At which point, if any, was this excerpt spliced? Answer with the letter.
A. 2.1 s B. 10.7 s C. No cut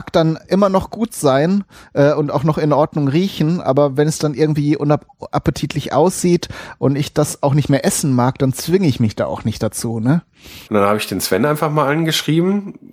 B